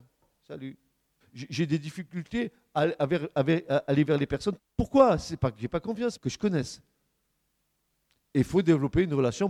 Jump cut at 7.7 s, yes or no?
no